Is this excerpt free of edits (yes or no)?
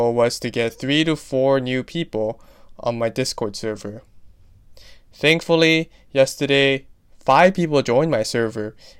yes